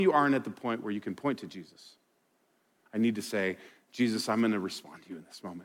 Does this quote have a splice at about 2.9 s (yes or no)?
yes